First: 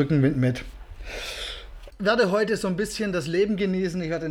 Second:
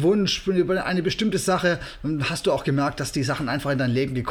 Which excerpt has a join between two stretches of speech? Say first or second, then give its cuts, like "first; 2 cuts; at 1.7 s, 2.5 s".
first; 1 cut; at 1.9 s